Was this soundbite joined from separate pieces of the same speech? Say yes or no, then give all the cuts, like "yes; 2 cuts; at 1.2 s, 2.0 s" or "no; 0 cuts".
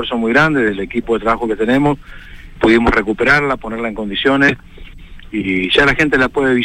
yes; 1 cut; at 2.5 s